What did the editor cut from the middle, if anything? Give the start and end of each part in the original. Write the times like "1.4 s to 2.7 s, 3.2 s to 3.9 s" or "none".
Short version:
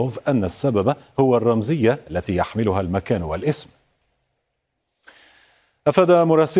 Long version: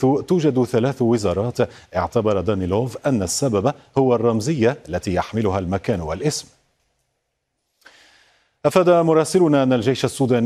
none